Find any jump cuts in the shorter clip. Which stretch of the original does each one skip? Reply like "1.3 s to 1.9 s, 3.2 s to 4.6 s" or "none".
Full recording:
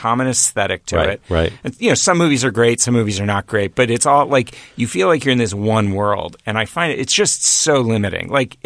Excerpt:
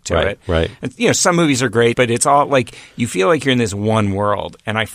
2.8 s to 3.7 s